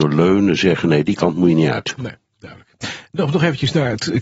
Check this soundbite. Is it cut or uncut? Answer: uncut